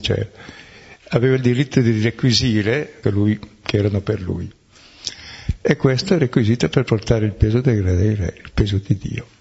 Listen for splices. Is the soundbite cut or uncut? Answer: cut